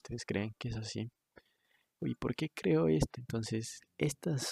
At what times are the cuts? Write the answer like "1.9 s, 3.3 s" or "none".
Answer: 2.0 s, 3.1 s